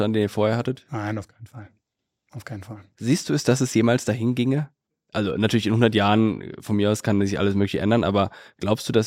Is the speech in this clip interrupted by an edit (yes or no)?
no